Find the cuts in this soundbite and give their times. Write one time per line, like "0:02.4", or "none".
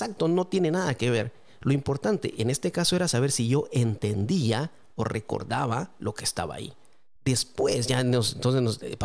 0:07.2

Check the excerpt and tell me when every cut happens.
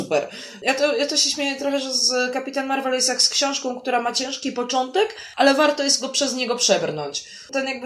none

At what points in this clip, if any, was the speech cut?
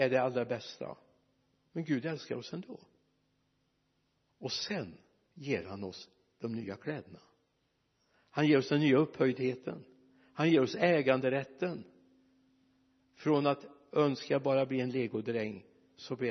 none

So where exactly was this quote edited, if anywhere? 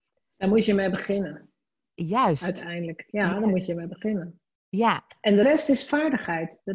0:05.4

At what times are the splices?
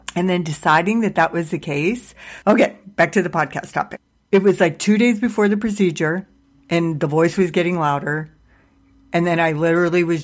0:02.4

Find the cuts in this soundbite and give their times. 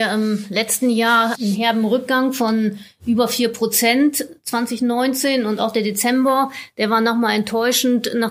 0:01.4

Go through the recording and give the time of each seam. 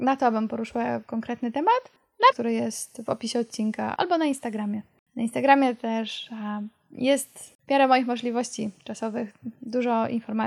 0:02.3
0:04.0
0:07.6

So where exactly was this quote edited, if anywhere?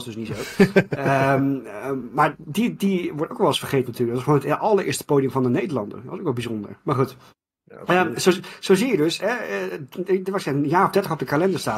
none

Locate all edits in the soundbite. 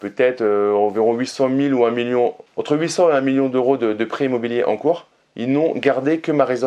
0:02.5

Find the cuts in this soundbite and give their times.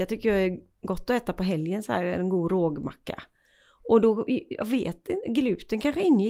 none

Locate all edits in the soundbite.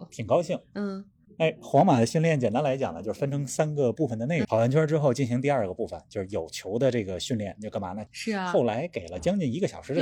0:04.4
0:08.1

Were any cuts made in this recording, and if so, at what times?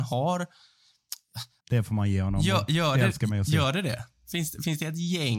0:01.6

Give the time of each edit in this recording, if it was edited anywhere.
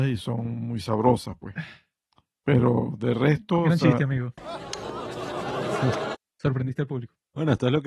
none

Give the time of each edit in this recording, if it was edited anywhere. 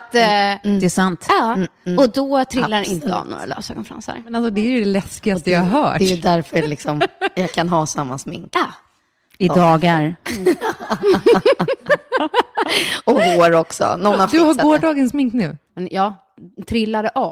0:15.7

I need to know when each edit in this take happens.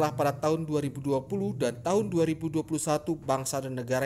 none

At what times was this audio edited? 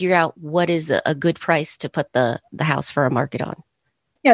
none

